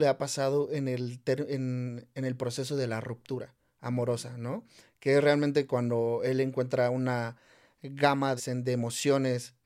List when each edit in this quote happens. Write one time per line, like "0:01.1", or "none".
0:08.4